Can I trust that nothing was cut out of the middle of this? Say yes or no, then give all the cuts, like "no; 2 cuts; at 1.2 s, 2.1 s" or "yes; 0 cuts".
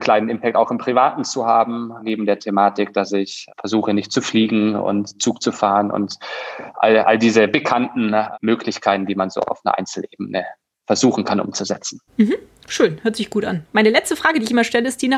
no; 2 cuts; at 12.1 s, 13.7 s